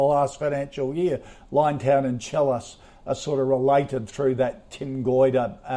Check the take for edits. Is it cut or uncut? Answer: uncut